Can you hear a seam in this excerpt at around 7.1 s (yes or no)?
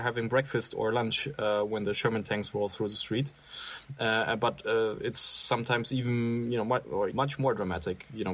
yes